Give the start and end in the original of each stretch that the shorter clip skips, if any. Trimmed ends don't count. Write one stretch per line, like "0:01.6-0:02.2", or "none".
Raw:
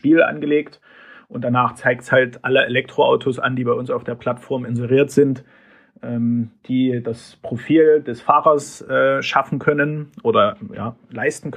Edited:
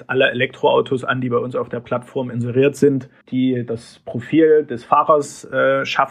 0:05.6-0:06.6